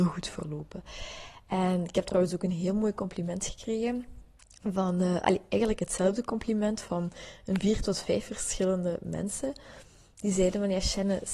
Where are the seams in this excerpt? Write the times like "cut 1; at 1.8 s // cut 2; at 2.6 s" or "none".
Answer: none

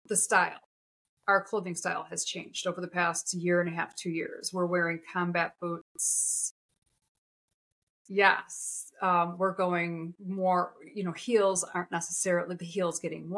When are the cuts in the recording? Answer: cut 1; at 10.2 s

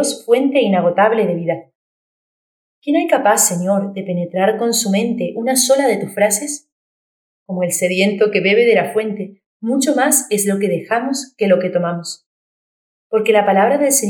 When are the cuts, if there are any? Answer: none

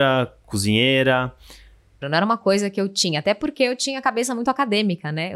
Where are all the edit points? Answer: cut 1; at 2.0 s

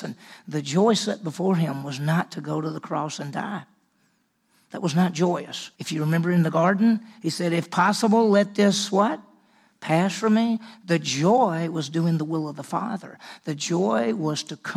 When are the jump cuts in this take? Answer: cut 1; at 5.7 s

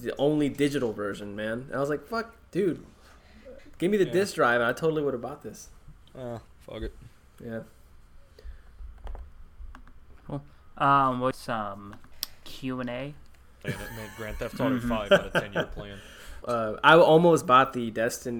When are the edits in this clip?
cut 1; at 11.3 s // cut 2; at 13.6 s // cut 3; at 16.4 s

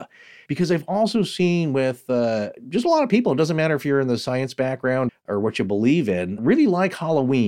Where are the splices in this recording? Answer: cut 1; at 5.1 s // cut 2; at 6.4 s

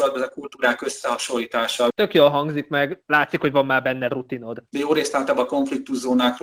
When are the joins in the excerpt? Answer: cut 1; at 1.9 s // cut 2; at 4.7 s

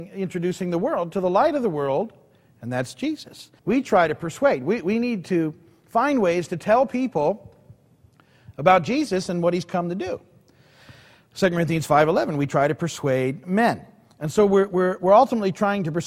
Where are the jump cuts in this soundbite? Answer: cut 1; at 3.6 s

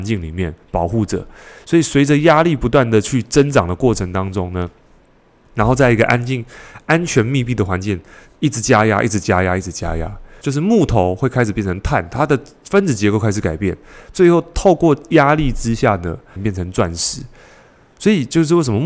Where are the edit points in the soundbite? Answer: cut 1; at 10.4 s // cut 2; at 16.4 s

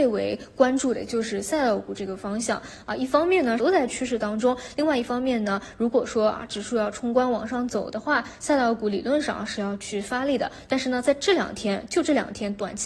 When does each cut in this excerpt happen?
cut 1; at 3.6 s

